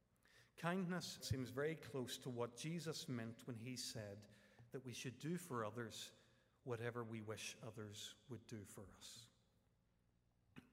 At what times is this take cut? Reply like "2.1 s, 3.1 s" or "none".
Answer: 1.2 s